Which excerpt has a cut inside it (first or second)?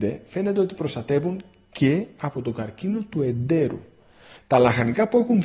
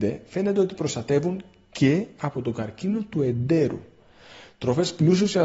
first